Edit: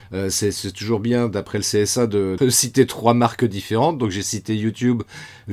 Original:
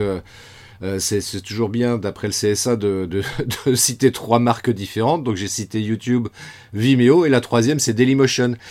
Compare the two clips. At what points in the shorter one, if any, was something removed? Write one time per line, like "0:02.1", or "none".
0:02.4